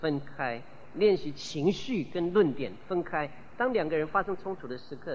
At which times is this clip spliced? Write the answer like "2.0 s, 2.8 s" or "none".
none